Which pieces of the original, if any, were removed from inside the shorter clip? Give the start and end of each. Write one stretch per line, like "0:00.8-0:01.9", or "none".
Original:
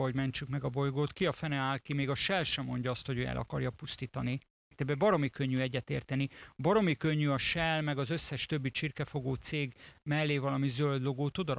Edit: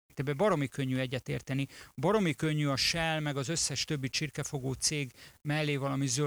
none